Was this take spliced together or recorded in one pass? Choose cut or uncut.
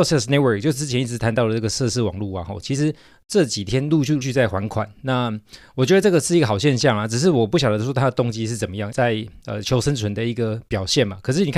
cut